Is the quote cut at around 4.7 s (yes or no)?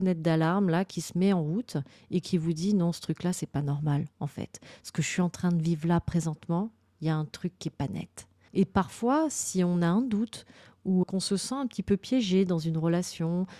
no